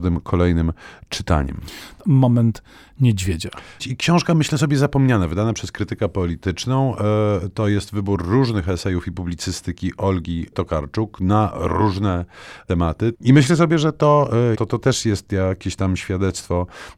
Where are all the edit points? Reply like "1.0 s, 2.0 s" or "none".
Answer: 3.8 s, 13.1 s, 14.5 s